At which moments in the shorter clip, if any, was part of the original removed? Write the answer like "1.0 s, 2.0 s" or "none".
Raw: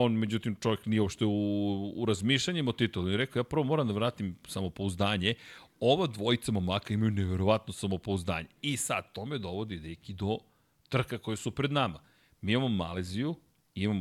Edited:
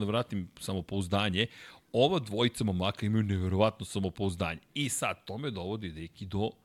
none